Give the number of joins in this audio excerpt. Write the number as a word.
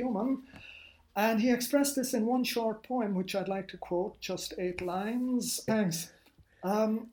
one